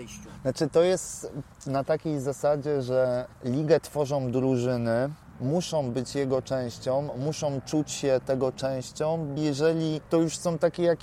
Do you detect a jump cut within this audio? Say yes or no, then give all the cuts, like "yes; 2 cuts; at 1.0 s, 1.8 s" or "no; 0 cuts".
yes; 2 cuts; at 5.3 s, 9.4 s